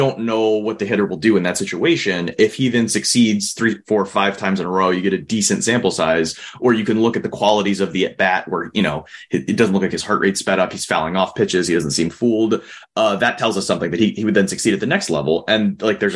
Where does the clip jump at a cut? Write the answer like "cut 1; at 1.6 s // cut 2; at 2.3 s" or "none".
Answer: none